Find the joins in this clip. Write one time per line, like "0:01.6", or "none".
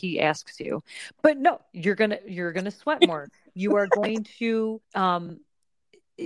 0:01.2
0:04.8